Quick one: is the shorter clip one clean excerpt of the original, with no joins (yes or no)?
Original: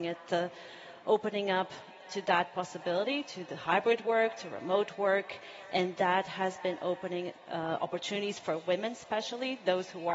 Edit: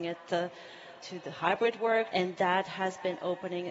no